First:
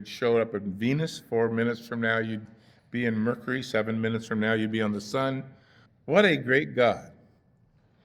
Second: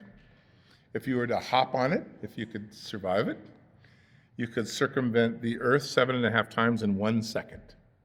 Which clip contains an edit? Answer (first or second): first